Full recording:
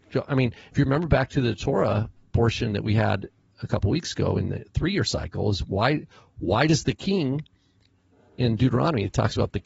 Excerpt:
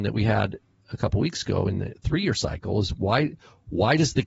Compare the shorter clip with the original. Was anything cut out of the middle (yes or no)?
no